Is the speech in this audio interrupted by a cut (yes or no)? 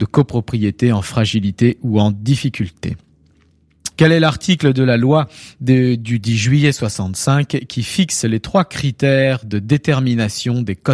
yes